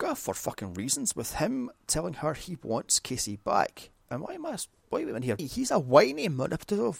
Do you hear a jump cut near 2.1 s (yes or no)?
no